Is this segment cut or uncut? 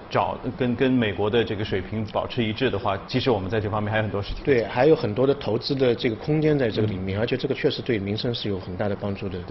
uncut